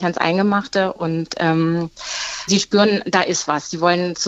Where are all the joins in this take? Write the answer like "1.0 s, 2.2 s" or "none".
2.5 s